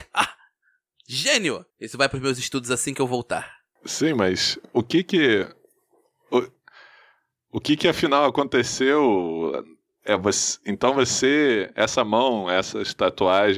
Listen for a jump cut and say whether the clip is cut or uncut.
cut